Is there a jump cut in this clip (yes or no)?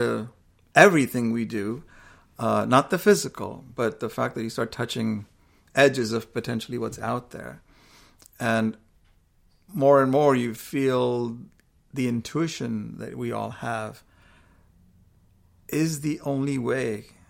no